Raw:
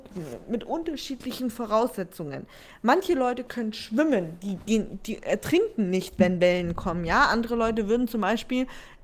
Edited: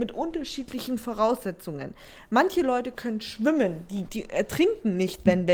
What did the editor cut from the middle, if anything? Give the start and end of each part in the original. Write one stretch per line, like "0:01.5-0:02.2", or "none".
0:04.6-0:05.0